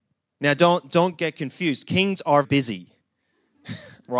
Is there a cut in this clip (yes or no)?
yes